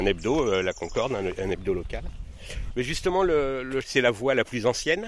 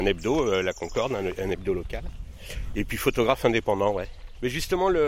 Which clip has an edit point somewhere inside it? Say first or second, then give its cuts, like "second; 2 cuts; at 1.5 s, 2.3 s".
first; 2 cuts; at 2.7 s, 3.8 s